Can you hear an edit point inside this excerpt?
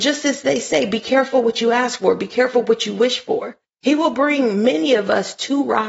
yes; 1 cut; at 3.7 s

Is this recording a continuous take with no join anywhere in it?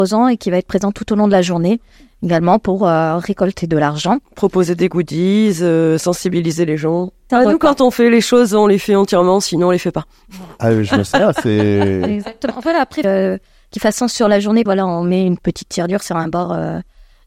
no; 3 cuts; at 7.3 s, 13.0 s, 14.7 s

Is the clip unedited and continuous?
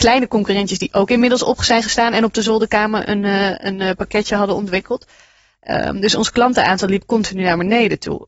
yes; 0 cuts

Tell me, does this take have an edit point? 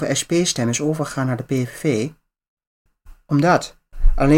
no; 0 cuts

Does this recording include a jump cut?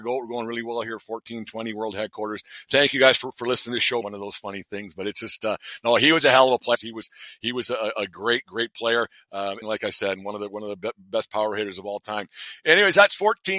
yes; 3 cuts; at 4.0 s, 6.7 s, 9.6 s

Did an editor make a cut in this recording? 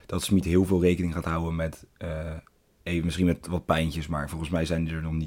no; 0 cuts

